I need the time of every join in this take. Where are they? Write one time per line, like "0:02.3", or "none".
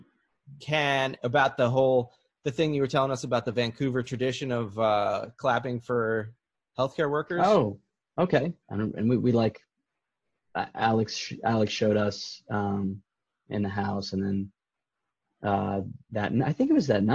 0:08.6